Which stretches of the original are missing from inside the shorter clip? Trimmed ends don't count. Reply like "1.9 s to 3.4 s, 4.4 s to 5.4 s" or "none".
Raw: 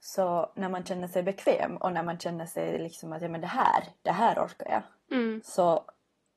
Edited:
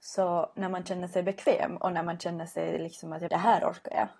3.3 s to 4.0 s